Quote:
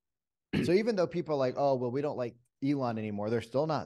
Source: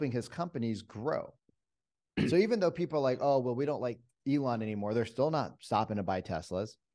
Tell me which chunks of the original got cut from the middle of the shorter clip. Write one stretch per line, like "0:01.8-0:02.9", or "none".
none